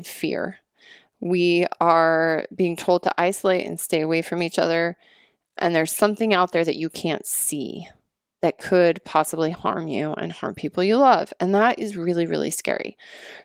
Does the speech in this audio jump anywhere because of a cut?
no; 0 cuts

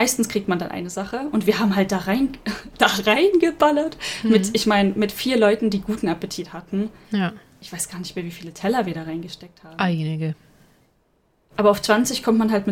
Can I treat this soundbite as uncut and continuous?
yes; 0 cuts

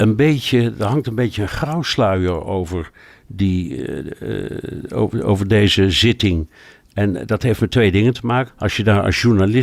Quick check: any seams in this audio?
yes; 1 cut; at 8.5 s

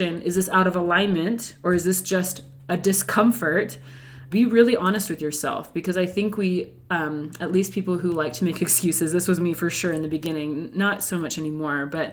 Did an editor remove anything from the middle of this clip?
yes; 1 cut; at 4.3 s

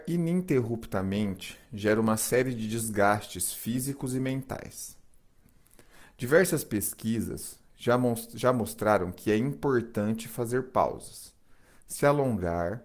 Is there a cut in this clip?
no; 0 cuts

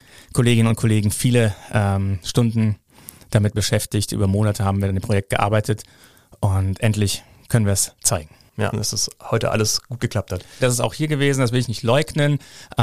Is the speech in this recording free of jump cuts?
no; 2 cuts; at 8.7 s, 10.6 s

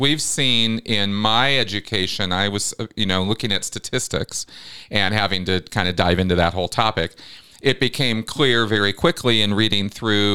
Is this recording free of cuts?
yes; 0 cuts

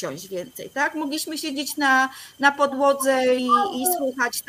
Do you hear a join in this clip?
yes; 1 cut; at 3.4 s

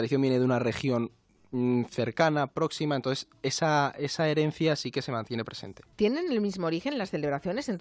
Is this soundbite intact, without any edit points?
no; 1 cut; at 5.9 s

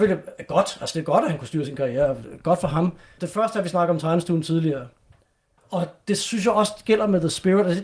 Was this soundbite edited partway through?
yes; 2 cuts; at 3.2 s, 5.6 s

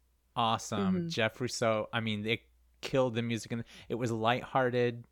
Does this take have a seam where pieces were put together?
no; 0 cuts

